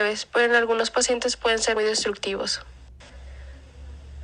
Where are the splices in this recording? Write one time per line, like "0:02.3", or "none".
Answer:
0:01.8